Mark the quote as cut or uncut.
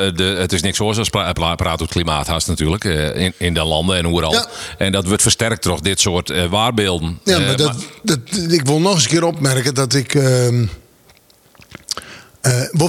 uncut